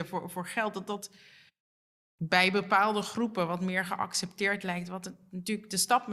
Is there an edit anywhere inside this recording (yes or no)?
no